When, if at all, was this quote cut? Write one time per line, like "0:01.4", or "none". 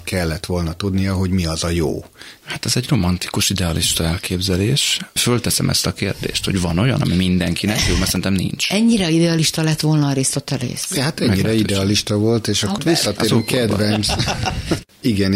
0:02.4
0:05.2
0:12.8